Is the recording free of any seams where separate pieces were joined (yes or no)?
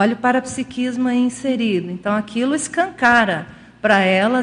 yes